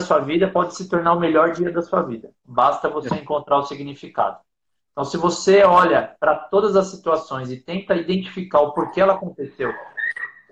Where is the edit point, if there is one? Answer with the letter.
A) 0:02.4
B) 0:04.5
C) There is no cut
C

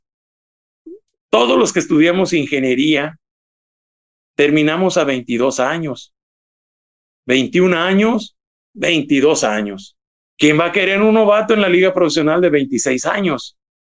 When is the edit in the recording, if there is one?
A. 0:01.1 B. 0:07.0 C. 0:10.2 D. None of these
C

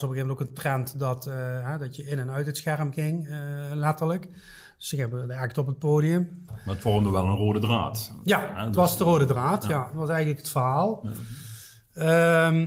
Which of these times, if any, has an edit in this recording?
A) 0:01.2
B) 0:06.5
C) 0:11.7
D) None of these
B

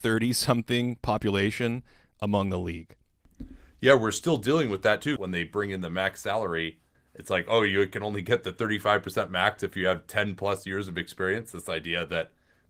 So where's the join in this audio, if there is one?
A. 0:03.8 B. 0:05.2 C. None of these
B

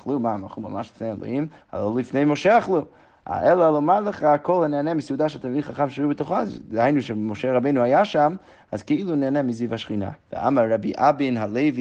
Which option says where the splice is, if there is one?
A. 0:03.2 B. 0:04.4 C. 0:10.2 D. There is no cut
C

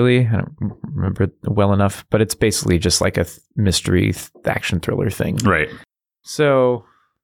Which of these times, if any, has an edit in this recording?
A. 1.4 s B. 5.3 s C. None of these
C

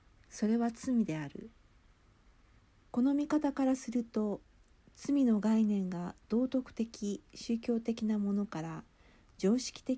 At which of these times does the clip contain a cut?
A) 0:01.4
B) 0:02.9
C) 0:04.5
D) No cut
B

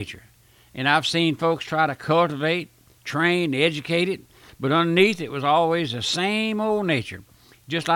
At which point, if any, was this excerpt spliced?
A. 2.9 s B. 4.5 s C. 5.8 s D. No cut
D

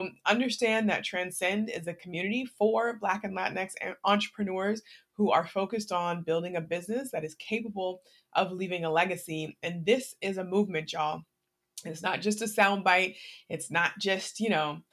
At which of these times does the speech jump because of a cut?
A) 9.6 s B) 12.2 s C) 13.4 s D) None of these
D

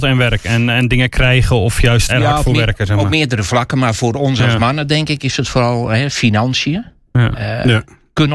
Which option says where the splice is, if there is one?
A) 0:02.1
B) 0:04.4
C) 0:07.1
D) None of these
A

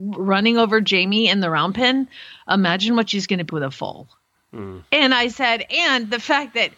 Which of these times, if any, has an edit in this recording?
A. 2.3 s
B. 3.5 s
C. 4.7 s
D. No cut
B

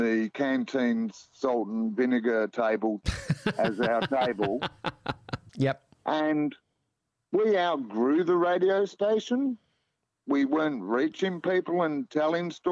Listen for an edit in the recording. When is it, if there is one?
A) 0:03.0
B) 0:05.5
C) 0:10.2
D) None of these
B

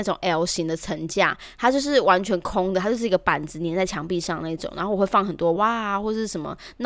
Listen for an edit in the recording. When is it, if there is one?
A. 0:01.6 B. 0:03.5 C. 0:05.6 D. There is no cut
C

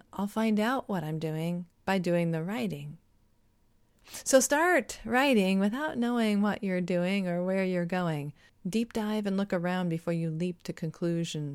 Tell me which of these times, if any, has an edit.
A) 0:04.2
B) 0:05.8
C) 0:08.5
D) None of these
C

